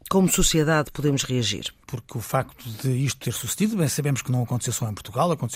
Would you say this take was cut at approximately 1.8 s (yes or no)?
yes